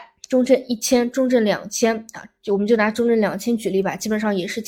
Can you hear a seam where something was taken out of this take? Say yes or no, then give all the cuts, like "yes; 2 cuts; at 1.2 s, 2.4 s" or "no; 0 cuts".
no; 0 cuts